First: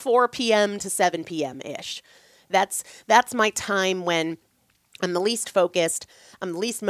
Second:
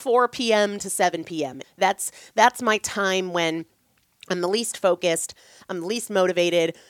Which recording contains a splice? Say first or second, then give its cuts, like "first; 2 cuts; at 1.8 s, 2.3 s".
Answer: second; 1 cut; at 1.6 s